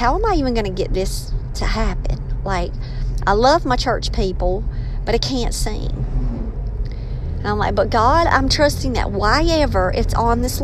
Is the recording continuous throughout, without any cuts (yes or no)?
yes